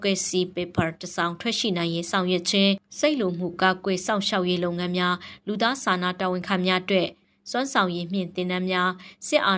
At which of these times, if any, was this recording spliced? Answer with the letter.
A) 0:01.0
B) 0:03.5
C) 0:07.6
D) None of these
D